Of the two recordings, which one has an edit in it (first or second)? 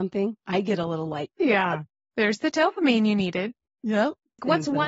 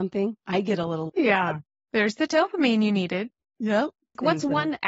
second